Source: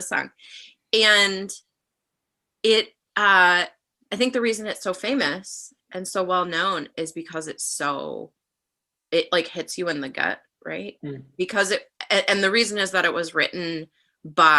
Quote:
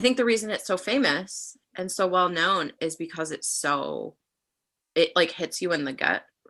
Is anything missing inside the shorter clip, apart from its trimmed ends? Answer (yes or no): no